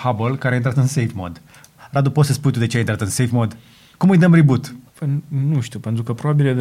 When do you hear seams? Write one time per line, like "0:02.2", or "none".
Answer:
0:04.9